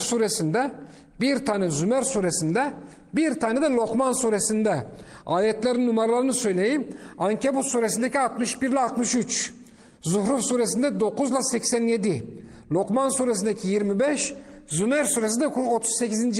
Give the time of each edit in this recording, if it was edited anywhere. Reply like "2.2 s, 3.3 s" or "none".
none